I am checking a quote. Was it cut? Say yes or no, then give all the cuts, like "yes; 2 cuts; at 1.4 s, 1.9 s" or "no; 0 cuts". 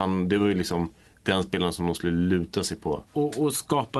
yes; 1 cut; at 3.1 s